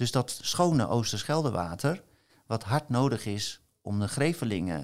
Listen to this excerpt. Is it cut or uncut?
uncut